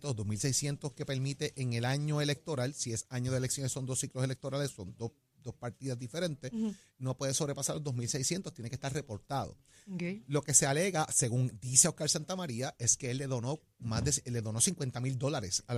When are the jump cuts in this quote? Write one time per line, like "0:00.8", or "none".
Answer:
none